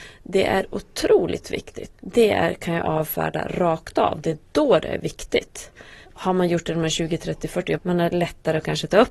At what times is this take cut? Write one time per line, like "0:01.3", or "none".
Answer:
0:01.9
0:06.0
0:07.8

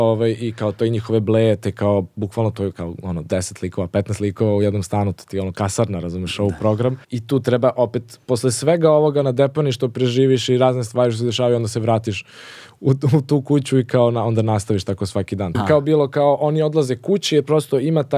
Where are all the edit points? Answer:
0:07.0
0:15.5

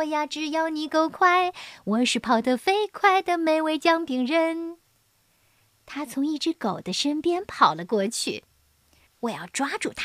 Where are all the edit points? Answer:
0:09.1

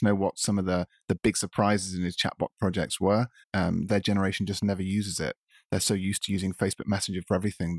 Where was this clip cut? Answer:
0:03.4

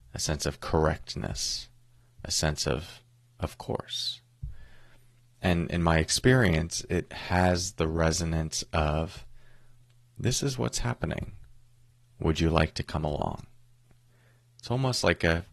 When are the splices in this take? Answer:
none

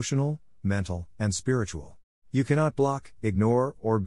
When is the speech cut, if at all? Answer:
0:02.1

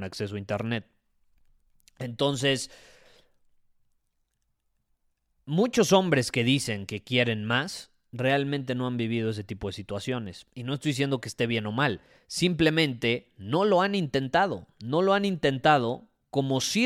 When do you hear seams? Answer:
none

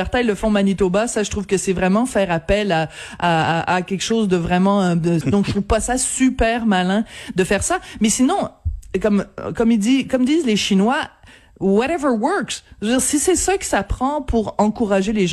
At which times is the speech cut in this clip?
0:05.2

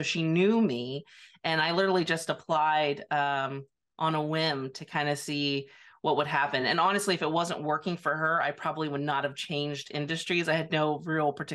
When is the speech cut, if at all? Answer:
none

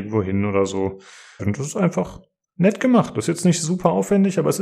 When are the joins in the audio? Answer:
0:01.4

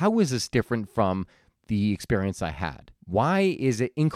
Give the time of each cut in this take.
0:03.0

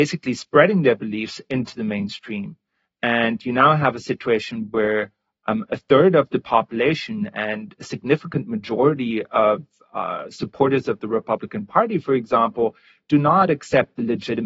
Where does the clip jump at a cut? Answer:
none

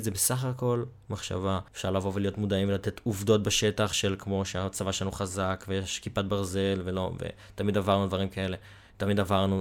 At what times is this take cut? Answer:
0:01.7

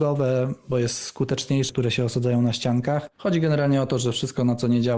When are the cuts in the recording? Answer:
0:01.7
0:03.2

